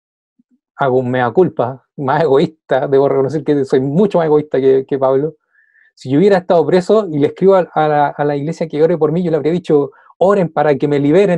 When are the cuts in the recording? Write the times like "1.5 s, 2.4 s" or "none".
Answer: none